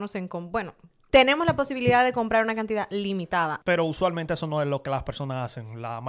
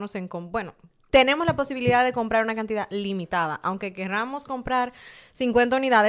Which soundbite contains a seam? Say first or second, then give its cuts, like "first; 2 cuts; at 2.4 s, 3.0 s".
first; 1 cut; at 3.6 s